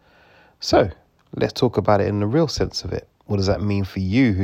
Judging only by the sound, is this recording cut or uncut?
uncut